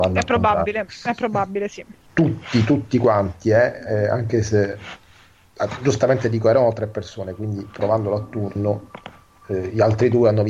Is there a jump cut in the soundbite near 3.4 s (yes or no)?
no